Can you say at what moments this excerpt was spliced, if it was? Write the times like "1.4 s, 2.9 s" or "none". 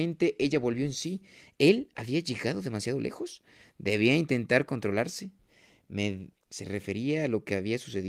1.5 s, 6.3 s